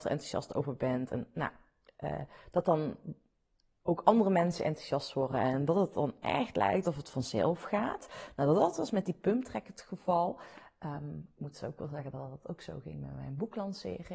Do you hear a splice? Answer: no; 0 cuts

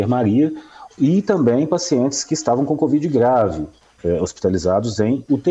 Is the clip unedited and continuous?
yes; 0 cuts

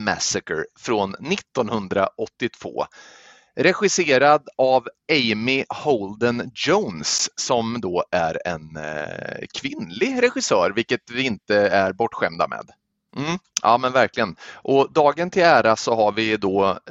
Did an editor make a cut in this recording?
yes; 1 cut; at 13.1 s

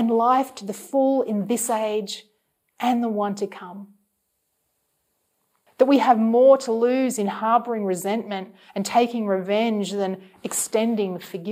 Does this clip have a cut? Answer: yes; 1 cut; at 5.7 s

